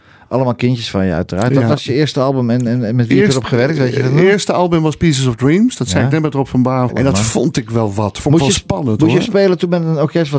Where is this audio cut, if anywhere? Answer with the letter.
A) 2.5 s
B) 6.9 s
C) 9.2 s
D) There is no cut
B